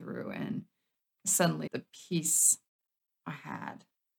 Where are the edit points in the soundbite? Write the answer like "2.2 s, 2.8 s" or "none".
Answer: 1.7 s